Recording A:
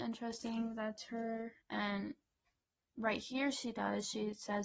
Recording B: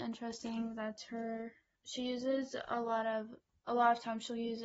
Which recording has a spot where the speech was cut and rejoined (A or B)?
A